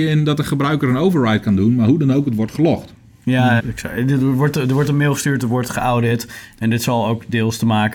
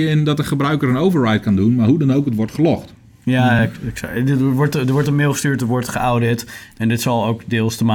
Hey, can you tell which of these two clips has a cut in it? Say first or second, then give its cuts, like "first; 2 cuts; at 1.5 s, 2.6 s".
first; 1 cut; at 3.6 s